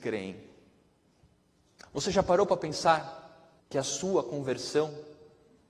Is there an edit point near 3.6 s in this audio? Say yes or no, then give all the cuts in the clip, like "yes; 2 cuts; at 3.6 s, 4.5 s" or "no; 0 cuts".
yes; 1 cut; at 3.6 s